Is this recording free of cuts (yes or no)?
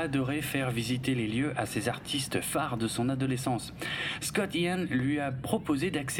yes